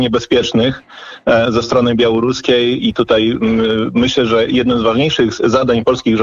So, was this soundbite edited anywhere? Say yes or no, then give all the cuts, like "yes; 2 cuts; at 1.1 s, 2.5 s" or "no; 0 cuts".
no; 0 cuts